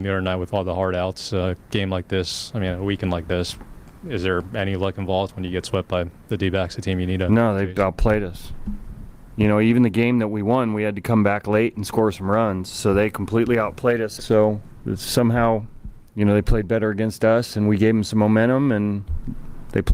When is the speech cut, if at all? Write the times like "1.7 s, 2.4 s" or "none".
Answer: 14.2 s, 16.1 s